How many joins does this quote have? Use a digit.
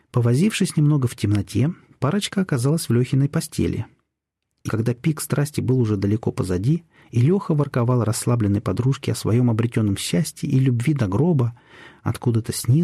1